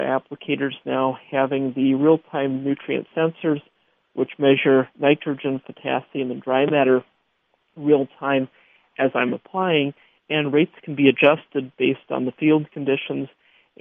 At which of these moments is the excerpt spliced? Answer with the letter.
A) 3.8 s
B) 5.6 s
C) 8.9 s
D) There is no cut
B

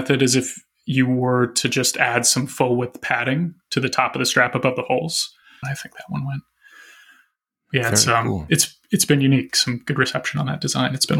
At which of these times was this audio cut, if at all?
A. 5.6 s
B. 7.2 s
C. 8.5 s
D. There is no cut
A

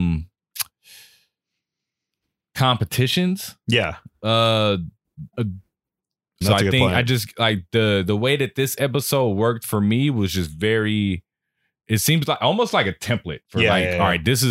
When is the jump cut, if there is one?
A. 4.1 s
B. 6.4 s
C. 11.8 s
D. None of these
B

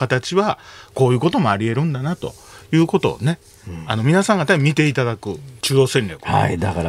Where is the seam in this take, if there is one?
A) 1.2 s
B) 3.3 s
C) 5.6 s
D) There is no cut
C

